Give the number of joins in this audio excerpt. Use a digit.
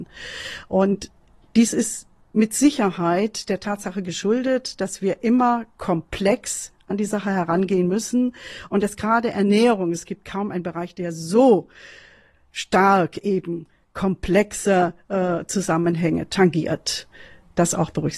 0